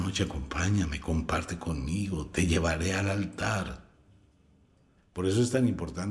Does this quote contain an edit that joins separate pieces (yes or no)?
yes